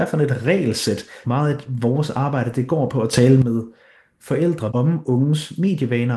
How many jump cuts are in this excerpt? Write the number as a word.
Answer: two